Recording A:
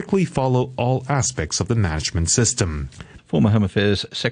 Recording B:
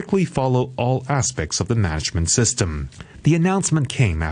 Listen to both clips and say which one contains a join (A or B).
A